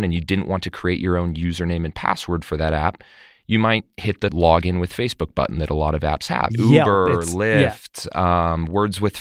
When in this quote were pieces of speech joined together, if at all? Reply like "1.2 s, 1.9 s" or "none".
6.5 s